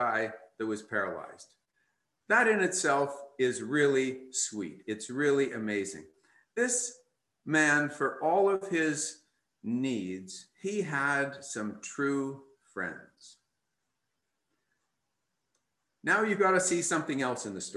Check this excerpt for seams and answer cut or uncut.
uncut